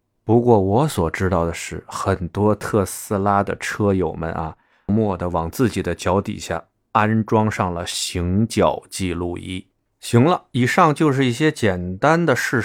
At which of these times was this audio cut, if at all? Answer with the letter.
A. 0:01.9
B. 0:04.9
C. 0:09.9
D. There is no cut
B